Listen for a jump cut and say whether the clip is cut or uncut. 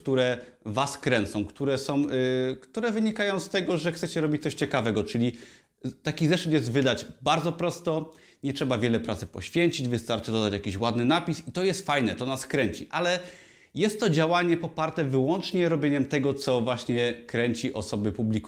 uncut